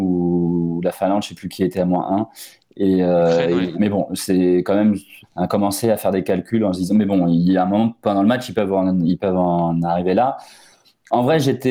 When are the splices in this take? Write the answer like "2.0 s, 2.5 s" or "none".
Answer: 3.7 s, 5.2 s

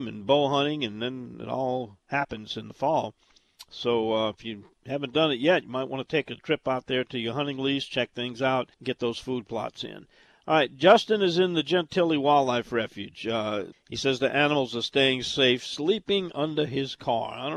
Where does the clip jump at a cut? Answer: 8.7 s, 13.7 s

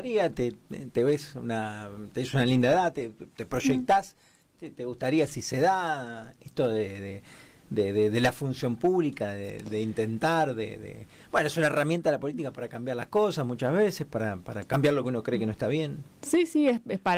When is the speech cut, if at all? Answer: none

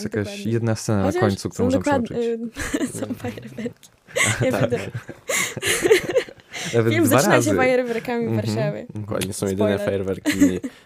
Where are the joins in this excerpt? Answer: none

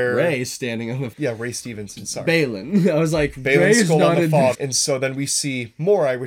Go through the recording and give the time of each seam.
1.1 s, 4.5 s

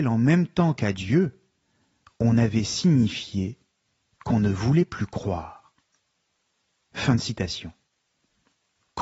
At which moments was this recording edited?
none

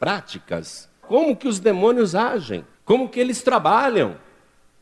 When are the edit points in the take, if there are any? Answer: 1.0 s, 2.7 s

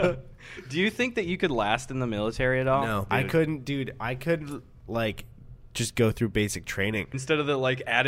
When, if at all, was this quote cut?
3.1 s, 7.1 s

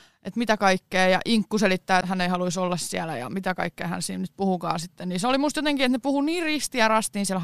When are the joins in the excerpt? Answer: 2.0 s

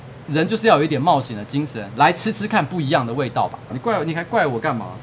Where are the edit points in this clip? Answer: 3.7 s

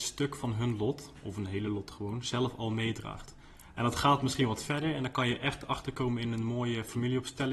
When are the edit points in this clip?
none

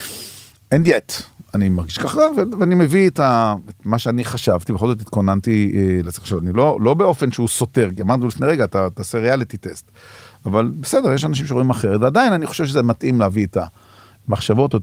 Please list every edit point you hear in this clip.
none

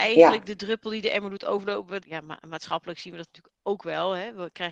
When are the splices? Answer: 2.0 s

